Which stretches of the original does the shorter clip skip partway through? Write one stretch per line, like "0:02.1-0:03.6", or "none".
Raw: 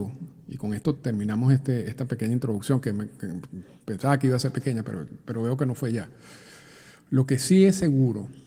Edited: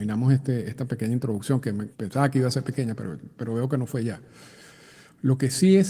0:03.1-0:03.8